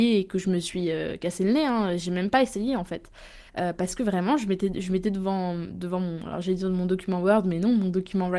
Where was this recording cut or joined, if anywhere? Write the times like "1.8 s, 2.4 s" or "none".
none